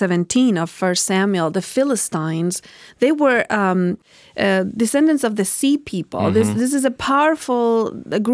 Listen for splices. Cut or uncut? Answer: uncut